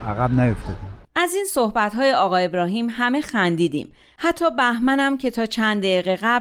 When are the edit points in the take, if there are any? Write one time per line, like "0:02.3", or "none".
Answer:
0:01.0